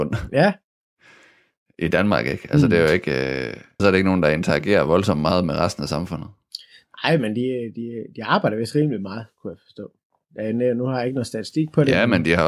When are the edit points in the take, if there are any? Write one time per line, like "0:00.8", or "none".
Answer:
0:03.8